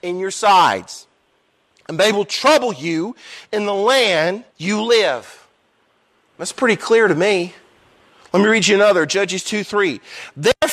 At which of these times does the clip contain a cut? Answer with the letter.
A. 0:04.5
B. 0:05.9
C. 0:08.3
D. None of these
A